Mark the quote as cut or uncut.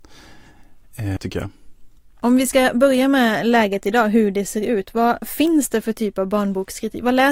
cut